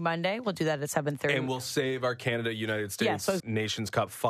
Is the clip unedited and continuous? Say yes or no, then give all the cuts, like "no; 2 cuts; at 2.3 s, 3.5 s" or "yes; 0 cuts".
no; 1 cut; at 3.4 s